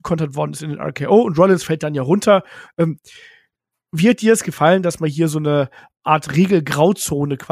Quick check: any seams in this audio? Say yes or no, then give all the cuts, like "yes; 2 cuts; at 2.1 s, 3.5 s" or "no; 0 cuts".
yes; 1 cut; at 2.7 s